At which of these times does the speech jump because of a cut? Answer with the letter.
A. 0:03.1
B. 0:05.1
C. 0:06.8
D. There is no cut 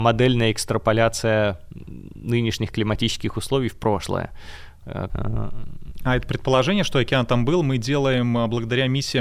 B